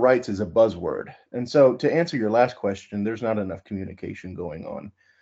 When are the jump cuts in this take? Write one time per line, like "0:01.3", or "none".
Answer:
none

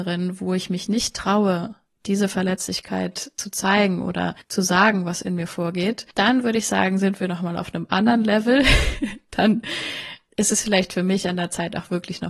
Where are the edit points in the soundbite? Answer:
none

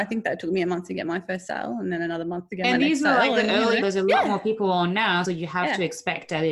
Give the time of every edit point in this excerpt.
0:03.8
0:05.2

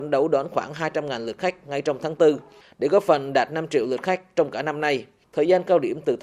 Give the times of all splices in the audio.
0:05.2

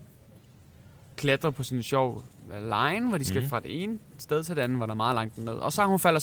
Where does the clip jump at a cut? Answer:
none

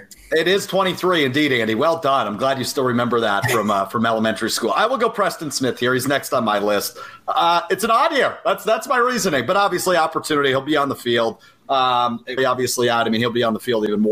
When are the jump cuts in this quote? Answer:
0:12.4

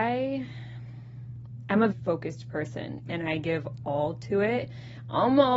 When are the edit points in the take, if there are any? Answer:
0:01.9
0:03.0

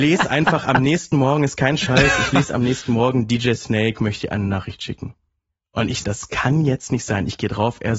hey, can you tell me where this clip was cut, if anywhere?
0:06.0

